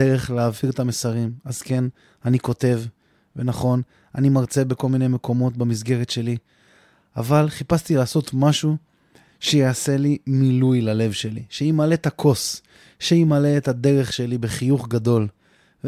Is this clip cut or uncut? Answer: uncut